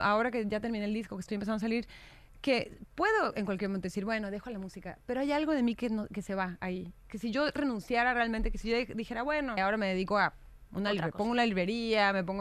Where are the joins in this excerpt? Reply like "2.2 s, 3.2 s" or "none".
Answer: 9.6 s